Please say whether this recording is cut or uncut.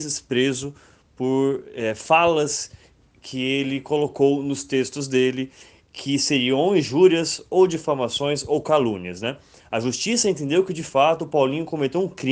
uncut